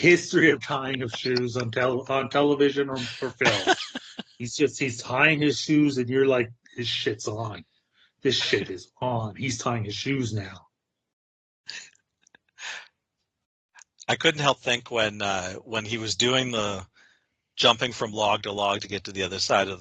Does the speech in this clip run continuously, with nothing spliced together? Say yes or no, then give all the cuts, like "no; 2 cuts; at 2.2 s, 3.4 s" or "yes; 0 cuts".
yes; 0 cuts